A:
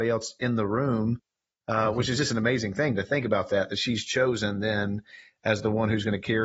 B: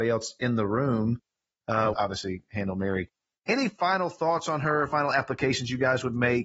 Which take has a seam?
B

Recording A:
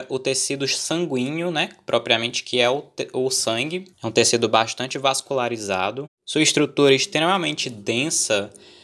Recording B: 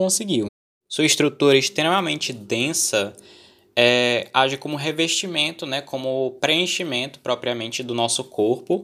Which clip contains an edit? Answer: A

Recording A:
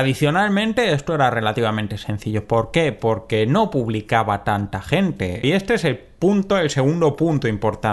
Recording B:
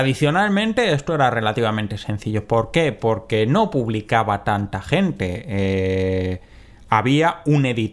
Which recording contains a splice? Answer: A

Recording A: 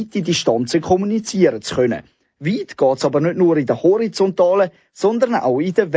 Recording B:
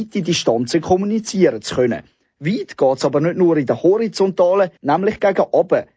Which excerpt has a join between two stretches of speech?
B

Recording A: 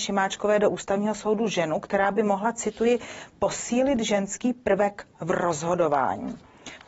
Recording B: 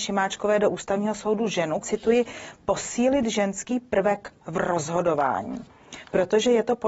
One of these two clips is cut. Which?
B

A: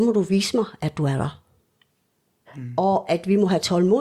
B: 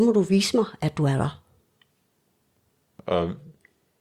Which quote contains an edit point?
A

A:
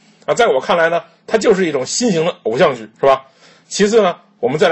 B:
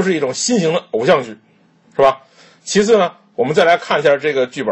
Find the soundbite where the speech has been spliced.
A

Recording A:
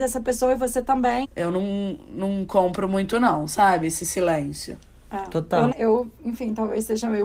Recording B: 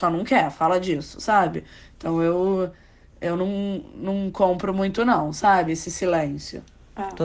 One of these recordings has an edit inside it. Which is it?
A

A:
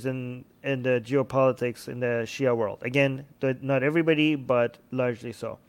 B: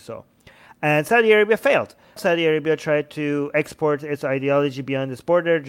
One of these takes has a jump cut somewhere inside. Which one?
B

